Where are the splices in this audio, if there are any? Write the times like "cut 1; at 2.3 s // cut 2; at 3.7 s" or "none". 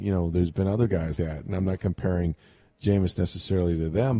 cut 1; at 1.2 s